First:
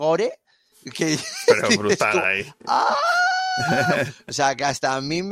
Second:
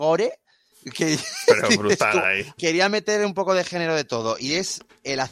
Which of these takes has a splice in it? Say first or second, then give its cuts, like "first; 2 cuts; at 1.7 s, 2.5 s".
second; 1 cut; at 2.6 s